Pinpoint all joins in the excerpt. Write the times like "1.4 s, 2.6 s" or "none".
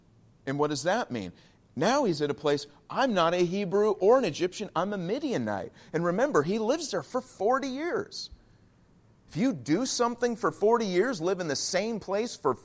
none